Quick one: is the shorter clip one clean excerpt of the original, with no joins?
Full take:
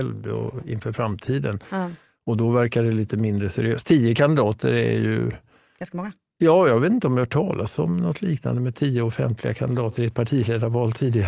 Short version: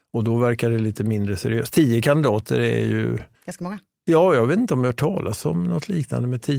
no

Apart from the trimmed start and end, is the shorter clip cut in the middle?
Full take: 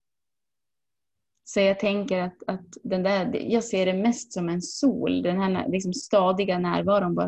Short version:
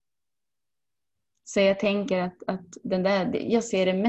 no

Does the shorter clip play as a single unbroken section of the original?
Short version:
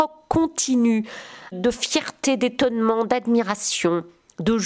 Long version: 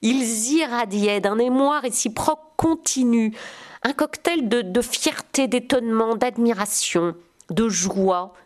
no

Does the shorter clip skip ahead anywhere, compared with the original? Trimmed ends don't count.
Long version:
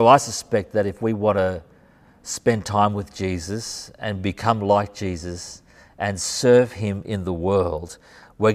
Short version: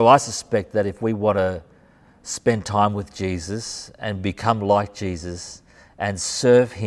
no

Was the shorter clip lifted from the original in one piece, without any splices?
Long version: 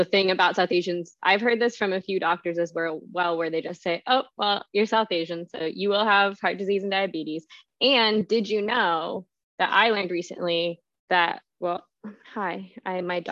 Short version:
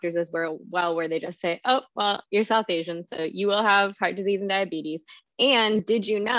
yes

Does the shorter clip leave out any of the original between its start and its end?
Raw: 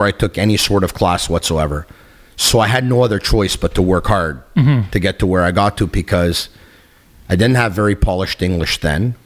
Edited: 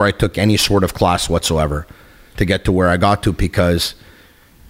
yes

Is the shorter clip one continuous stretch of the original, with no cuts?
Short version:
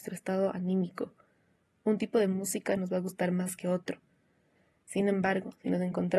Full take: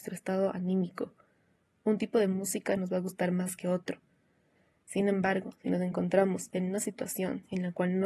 yes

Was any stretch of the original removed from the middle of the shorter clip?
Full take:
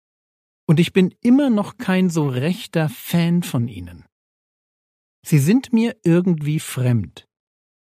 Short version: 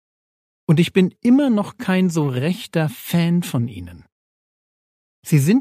no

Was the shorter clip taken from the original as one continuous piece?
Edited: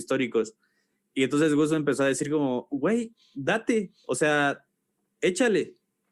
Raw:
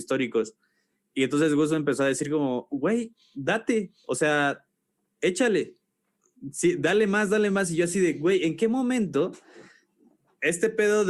yes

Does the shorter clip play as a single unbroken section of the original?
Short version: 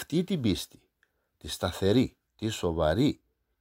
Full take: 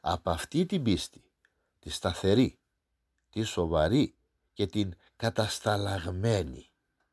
no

